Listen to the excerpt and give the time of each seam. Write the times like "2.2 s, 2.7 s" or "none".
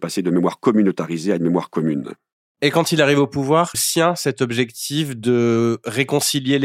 3.7 s